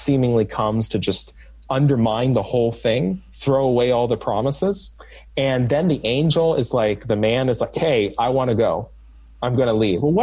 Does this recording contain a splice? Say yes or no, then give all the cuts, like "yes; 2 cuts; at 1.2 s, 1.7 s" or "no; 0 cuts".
no; 0 cuts